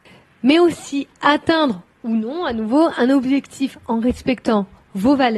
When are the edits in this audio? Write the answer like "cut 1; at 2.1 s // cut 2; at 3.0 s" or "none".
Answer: none